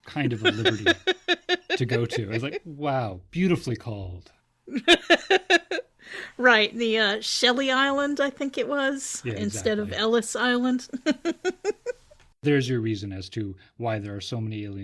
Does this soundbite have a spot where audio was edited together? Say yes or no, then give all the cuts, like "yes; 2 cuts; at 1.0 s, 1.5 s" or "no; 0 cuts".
no; 0 cuts